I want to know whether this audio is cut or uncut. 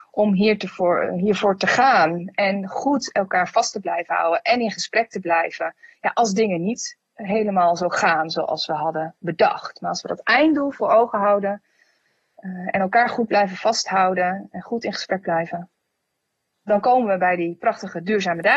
uncut